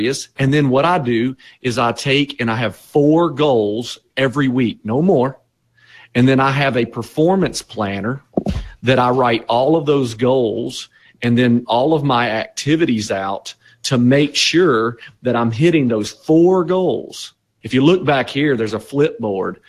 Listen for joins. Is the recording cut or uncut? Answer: cut